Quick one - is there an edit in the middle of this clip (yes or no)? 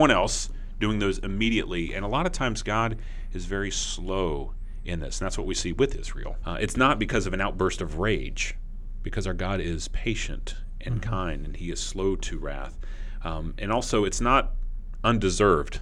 yes